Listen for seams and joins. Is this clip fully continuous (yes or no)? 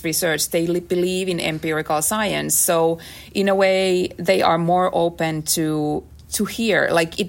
yes